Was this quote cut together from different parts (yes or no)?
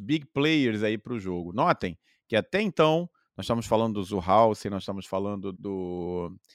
yes